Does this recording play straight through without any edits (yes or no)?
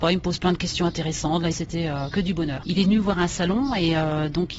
no